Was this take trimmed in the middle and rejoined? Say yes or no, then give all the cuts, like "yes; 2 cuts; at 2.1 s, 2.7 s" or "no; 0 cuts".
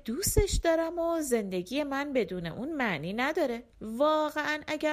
yes; 1 cut; at 3.7 s